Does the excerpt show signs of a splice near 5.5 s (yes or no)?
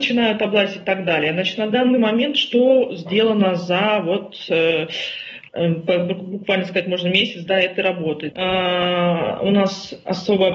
yes